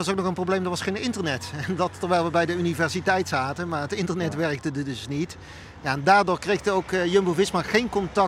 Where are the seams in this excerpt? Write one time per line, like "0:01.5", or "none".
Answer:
none